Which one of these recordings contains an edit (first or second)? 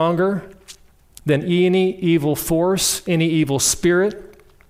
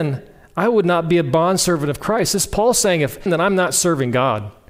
second